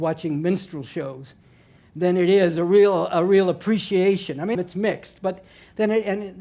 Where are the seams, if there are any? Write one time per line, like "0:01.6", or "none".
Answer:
0:04.5